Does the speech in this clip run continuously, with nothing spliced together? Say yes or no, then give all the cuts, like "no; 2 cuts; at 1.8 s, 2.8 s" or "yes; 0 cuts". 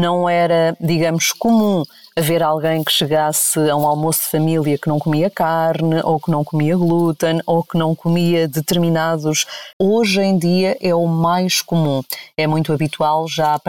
no; 1 cut; at 9.7 s